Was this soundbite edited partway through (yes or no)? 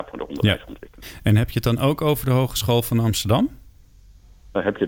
no